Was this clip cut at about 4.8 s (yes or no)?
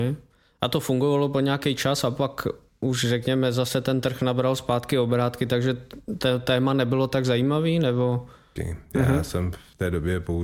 no